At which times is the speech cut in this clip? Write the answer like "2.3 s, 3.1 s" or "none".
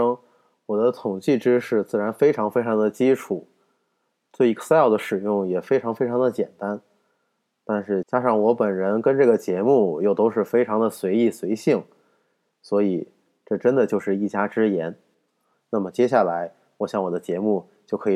8.0 s, 15.5 s